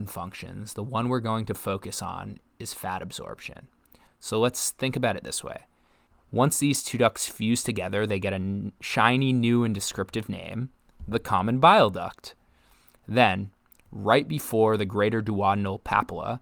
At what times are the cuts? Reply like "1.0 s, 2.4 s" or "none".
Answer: 4.1 s, 6.1 s